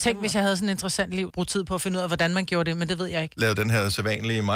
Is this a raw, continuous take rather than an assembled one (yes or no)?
no